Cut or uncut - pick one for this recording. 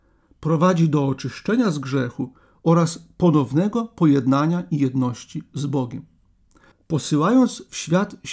cut